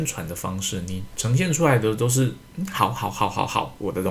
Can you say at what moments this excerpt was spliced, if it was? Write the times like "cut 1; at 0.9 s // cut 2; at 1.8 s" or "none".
none

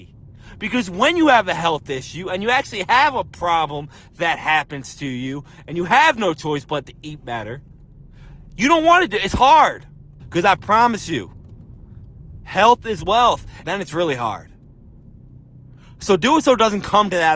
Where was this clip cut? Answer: cut 1; at 10.2 s // cut 2; at 13.6 s

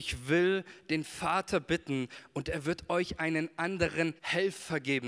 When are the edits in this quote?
cut 1; at 4.2 s

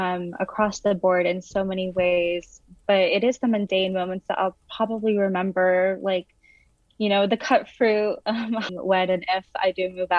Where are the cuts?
cut 1; at 8.7 s

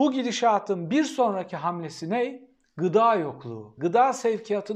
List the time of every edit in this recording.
cut 1; at 3.8 s

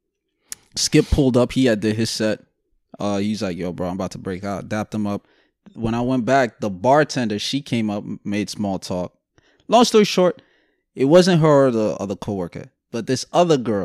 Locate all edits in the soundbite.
none

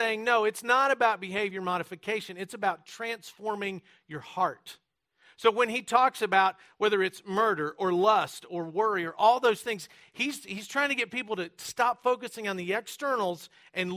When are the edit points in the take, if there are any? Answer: none

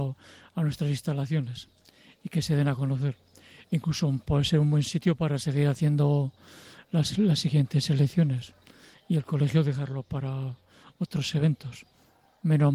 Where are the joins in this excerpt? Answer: none

